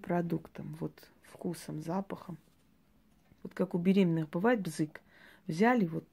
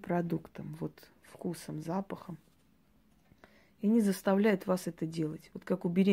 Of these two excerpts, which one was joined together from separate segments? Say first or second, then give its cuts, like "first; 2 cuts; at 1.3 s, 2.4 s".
first; 1 cut; at 3.4 s